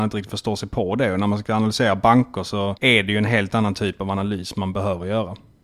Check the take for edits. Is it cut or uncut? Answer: uncut